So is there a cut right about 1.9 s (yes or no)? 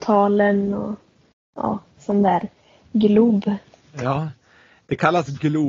yes